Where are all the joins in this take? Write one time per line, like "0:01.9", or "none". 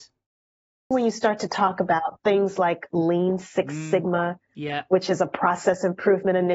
0:00.9